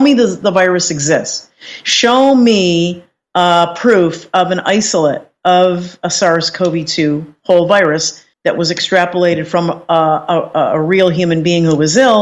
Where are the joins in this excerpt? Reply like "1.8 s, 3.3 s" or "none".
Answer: 8.3 s